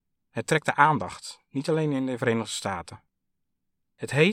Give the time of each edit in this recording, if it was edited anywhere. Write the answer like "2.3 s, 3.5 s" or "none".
none